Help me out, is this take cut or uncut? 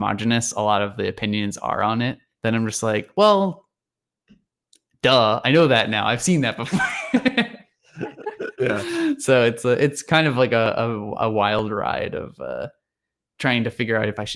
uncut